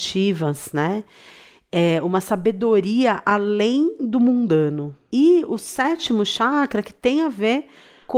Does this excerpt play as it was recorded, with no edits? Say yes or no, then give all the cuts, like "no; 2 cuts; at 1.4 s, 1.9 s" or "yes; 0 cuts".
yes; 0 cuts